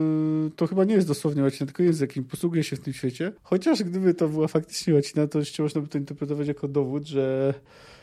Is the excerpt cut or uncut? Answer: cut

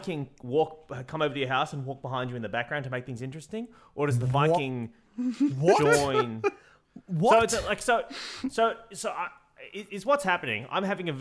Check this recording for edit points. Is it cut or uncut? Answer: uncut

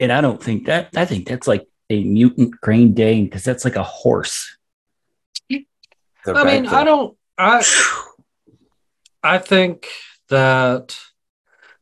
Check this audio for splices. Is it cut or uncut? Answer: uncut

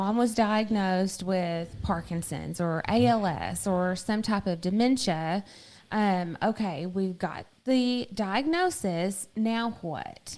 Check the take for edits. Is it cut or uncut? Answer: uncut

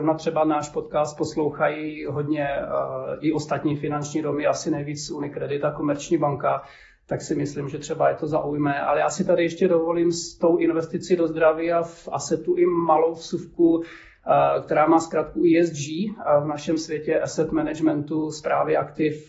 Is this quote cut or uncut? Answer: uncut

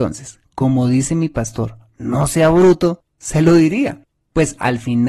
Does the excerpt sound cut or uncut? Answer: uncut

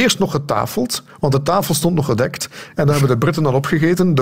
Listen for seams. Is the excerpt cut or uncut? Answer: uncut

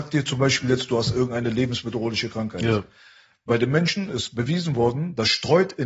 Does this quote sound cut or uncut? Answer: uncut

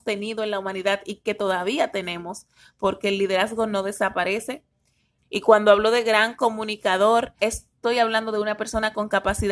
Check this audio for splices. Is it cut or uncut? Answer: cut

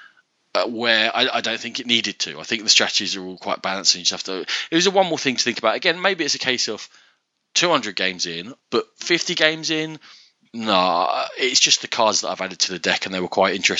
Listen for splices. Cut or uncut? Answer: cut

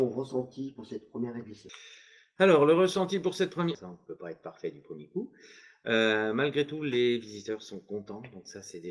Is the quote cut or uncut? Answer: cut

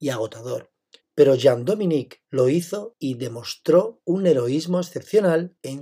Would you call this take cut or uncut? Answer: cut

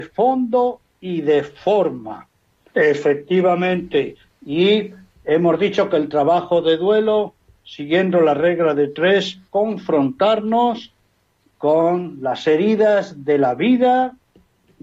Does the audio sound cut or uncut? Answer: cut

